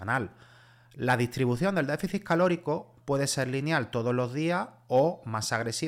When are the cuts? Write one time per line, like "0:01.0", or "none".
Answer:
none